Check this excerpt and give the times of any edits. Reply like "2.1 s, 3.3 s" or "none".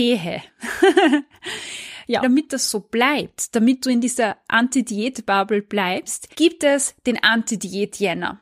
2.2 s, 6.3 s